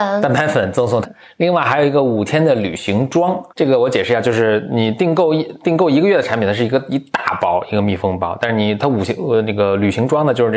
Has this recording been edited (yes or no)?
yes